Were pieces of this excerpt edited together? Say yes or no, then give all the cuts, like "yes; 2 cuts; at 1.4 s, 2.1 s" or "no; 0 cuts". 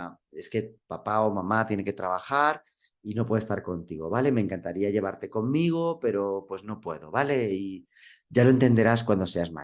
no; 0 cuts